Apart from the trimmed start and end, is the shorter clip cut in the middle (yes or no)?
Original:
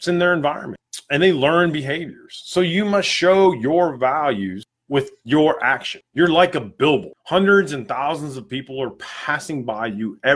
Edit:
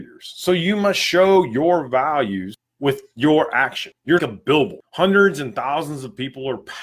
yes